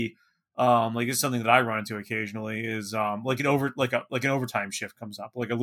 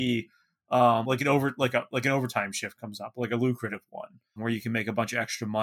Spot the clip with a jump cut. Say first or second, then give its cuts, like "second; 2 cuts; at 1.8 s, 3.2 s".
second; 2 cuts; at 1.0 s, 4.4 s